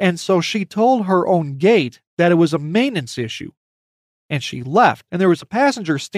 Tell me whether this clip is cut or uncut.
cut